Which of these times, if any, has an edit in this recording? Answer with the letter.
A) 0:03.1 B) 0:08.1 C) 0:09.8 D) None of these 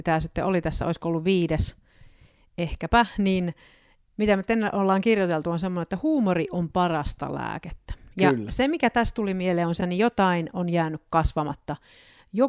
C